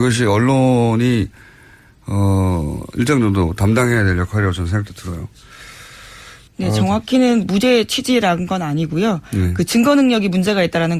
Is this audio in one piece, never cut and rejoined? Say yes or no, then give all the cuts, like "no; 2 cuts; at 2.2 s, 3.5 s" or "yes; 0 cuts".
no; 1 cut; at 6.5 s